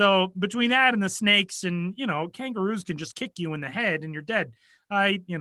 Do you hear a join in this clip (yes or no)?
yes